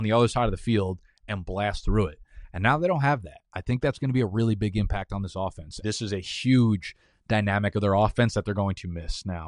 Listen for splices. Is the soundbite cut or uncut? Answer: cut